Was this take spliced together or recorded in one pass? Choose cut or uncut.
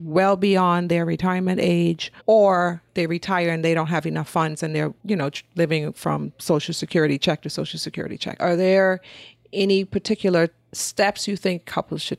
cut